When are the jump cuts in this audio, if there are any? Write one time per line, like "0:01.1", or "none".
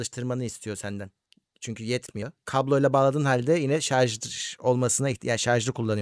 0:02.4